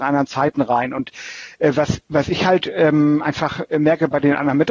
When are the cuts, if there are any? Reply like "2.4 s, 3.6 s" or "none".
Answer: none